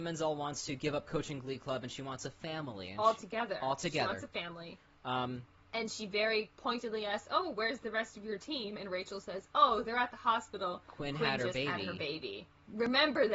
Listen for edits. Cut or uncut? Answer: uncut